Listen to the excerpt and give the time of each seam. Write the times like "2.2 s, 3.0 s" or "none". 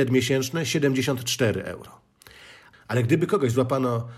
none